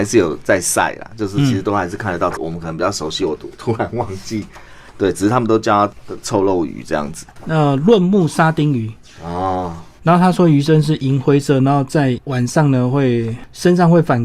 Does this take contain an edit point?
yes; 1 cut; at 2.4 s

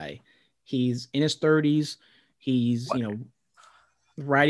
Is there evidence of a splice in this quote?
no; 0 cuts

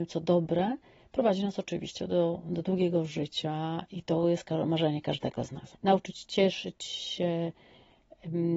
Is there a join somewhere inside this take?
yes; 1 cut; at 5.7 s

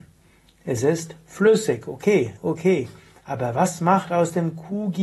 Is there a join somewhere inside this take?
yes; 1 cut; at 2.4 s

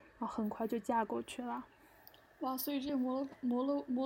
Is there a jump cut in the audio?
no; 0 cuts

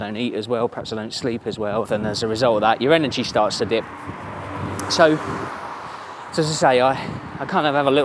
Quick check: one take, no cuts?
no; 1 cut; at 1.8 s

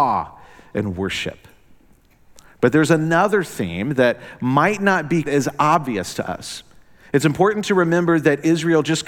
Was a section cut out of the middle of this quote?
yes; 1 cut; at 5.3 s

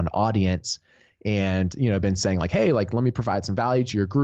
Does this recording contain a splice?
no; 0 cuts

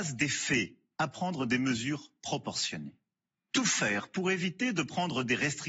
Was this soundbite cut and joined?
yes; 1 cut; at 0.9 s

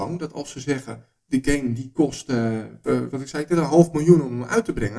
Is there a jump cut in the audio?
yes; 1 cut; at 2.8 s

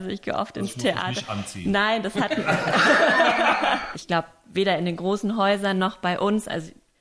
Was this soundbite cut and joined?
yes; 1 cut; at 3.9 s

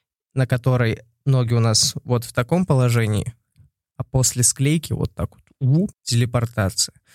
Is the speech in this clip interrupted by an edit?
yes; 1 cut; at 5.9 s

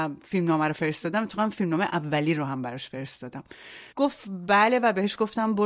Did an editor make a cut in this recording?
yes; 1 cut; at 3.9 s

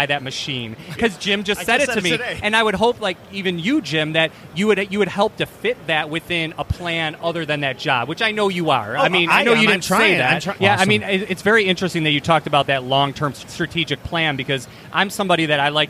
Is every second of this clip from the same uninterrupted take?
no; 2 cuts; at 0.9 s, 10.6 s

